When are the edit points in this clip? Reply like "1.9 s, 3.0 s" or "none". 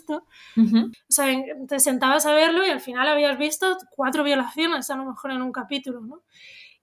0.9 s